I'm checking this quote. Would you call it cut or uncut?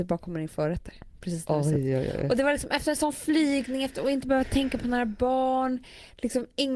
uncut